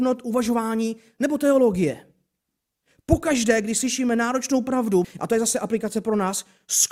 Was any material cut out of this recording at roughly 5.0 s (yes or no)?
yes